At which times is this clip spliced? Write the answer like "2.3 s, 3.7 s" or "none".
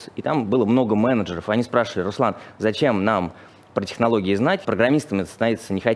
4.6 s